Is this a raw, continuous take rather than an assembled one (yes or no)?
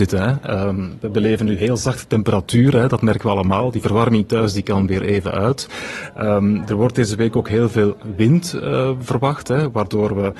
yes